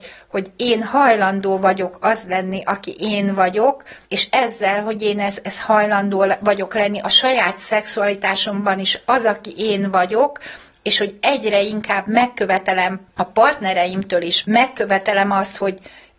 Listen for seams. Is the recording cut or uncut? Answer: cut